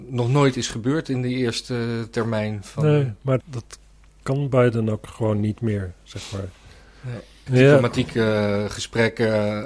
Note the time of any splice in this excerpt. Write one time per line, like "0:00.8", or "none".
0:03.4
0:07.5